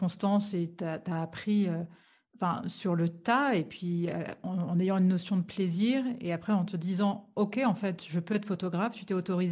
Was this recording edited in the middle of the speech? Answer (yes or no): no